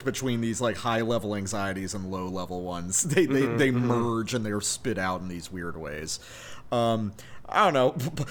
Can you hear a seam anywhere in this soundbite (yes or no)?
no